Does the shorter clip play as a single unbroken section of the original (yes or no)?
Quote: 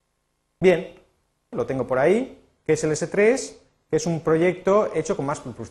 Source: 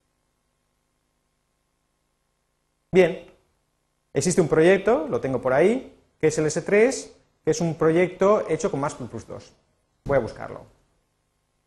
no